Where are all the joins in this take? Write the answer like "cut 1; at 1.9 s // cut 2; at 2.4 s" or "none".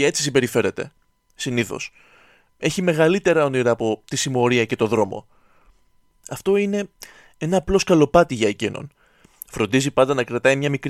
none